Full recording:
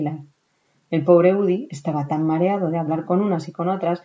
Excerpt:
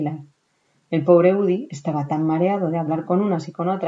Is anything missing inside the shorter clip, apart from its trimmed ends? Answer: no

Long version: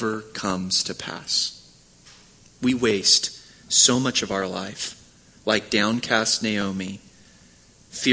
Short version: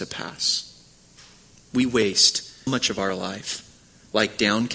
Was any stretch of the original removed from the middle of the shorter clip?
yes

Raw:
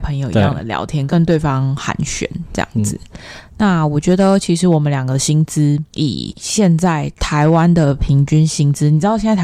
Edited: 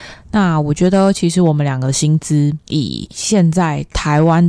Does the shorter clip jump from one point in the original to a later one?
no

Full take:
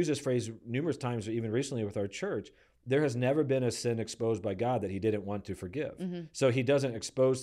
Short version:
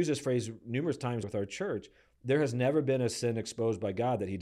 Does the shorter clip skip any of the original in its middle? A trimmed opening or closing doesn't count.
yes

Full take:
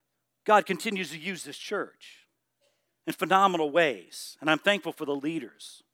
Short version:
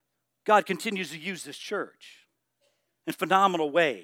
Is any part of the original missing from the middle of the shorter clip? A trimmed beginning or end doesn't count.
no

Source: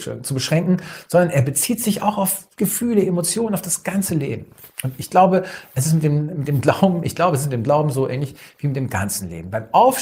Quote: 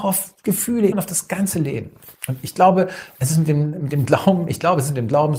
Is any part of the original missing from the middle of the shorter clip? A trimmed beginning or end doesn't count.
yes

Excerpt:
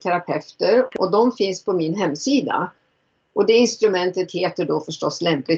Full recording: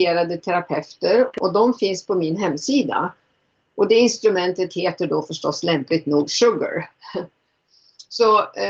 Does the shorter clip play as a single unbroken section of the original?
yes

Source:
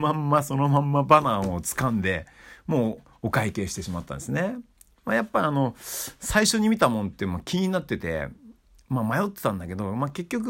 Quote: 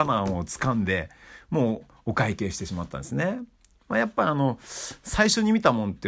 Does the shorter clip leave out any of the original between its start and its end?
no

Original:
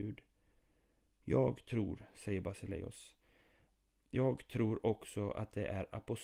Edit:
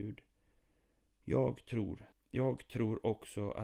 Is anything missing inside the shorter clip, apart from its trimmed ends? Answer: yes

